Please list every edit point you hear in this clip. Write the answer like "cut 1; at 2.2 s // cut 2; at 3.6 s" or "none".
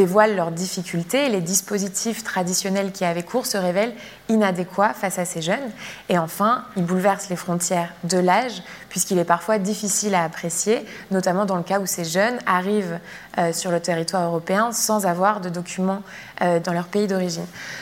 cut 1; at 16.6 s